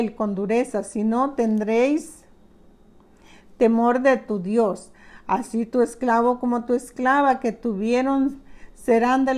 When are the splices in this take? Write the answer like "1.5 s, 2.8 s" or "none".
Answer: none